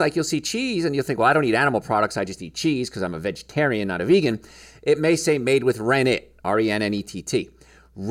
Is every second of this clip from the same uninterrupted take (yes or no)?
yes